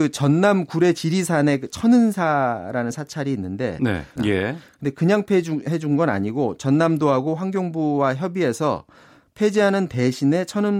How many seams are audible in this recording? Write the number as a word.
one